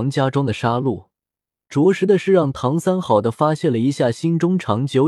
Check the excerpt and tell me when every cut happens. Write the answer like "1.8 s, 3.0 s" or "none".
3.0 s